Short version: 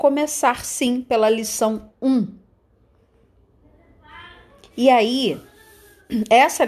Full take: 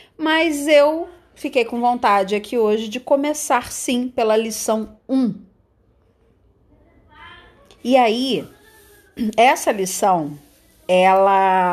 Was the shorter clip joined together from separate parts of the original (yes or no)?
no